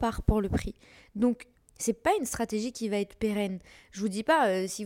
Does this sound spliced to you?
yes; 1 cut; at 1.6 s

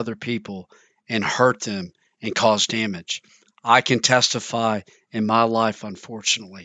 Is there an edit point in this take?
no; 0 cuts

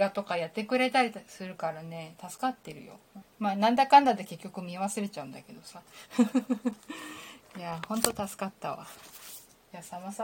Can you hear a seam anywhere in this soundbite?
yes; 1 cut; at 3.2 s

